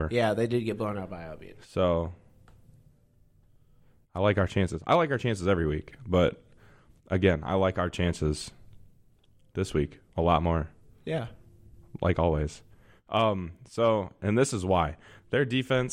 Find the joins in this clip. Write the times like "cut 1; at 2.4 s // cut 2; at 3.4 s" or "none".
none